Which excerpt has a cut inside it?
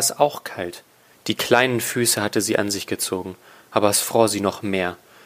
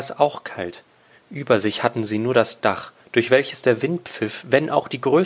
first; 1 cut; at 1.1 s

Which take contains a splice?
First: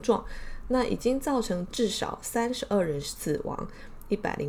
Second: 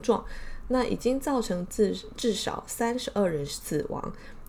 first; 1 cut; at 1.7 s

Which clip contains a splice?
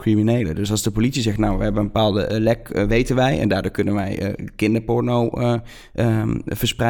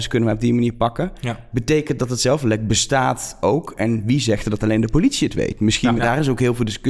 second; 1 cut; at 6.0 s

